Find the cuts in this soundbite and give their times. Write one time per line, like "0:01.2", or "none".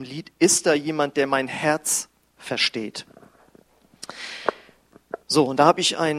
0:05.2